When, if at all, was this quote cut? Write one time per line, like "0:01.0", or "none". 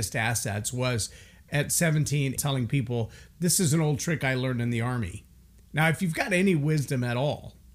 0:02.4
0:05.6